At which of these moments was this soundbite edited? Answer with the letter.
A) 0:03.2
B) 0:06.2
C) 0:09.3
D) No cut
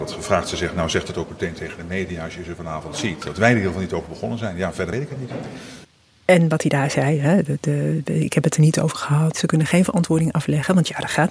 C